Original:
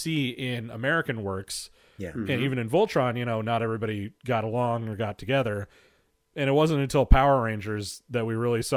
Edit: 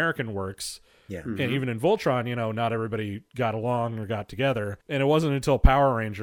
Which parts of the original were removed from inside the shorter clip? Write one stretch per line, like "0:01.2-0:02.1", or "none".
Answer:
0:05.7-0:06.3